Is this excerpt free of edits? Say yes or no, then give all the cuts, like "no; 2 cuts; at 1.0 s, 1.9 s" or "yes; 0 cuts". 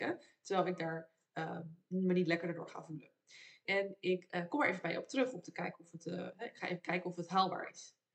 no; 1 cut; at 3.7 s